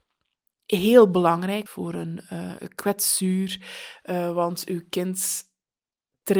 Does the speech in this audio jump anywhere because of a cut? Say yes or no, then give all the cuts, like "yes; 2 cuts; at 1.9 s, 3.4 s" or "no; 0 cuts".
yes; 1 cut; at 1.7 s